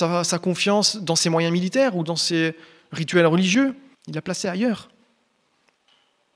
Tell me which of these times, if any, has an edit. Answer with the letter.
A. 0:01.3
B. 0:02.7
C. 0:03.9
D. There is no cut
C